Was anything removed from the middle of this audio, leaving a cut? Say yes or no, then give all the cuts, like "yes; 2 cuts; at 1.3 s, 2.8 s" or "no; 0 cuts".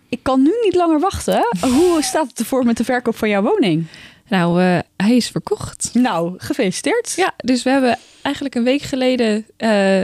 no; 0 cuts